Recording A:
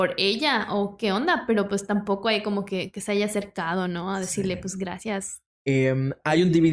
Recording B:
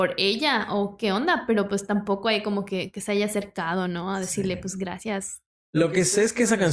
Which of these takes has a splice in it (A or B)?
A